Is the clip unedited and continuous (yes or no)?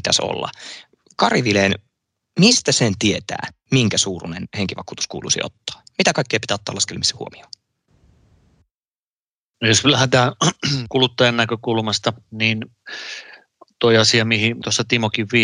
yes